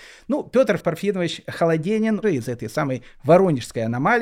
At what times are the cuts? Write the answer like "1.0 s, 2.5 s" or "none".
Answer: 2.2 s